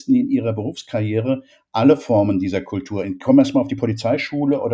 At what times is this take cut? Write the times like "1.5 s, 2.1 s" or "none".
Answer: none